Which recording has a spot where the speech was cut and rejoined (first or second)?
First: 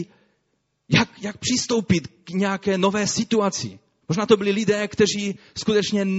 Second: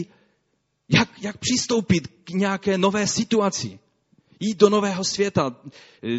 first